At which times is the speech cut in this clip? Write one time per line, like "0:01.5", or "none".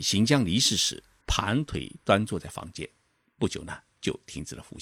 0:01.2

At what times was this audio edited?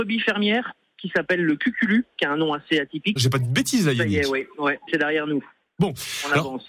0:03.2
0:04.9

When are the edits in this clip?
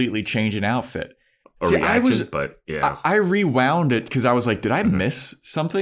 0:01.4

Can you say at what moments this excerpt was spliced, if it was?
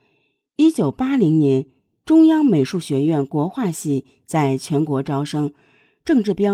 none

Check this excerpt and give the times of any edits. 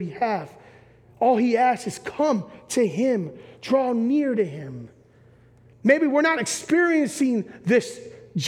0:05.7

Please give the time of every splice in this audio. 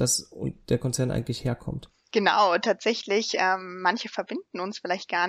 0:02.0

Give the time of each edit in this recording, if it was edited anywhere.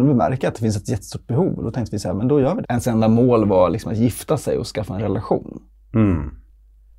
0:02.6

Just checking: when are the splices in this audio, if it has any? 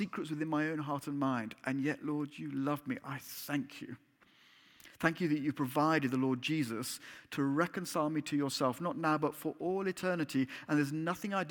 none

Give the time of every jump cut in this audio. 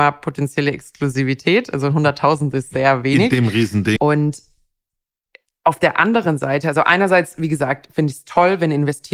0:04.0

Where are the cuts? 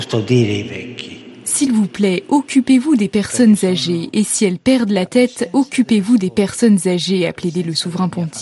none

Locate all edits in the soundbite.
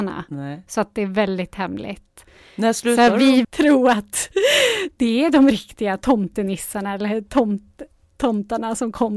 0:03.4

